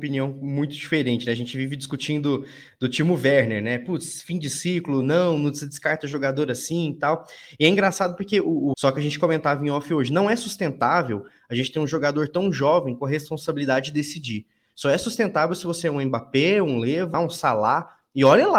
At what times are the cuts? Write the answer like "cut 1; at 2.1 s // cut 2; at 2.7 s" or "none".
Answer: cut 1; at 8.7 s // cut 2; at 17.1 s